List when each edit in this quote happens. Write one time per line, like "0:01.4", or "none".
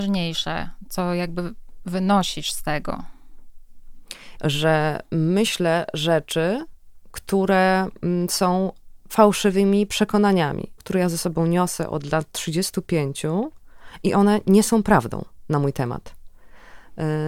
0:04.4
0:10.8